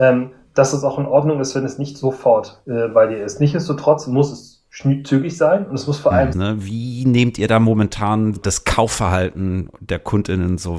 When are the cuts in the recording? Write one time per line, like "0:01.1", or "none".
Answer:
0:06.3
0:08.4